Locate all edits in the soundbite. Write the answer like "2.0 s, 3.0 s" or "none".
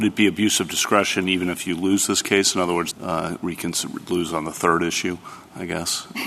2.9 s